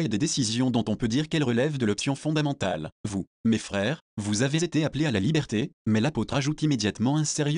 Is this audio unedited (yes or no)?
no